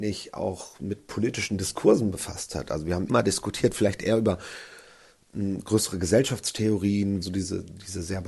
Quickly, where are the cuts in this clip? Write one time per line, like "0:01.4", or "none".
0:03.1
0:07.2